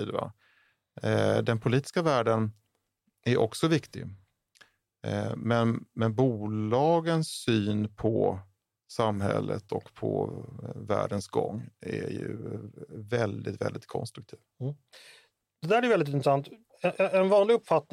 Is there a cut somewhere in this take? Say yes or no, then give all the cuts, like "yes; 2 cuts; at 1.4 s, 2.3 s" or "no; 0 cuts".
no; 0 cuts